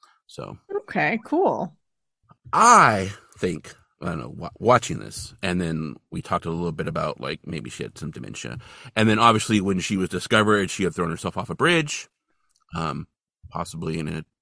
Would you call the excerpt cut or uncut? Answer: uncut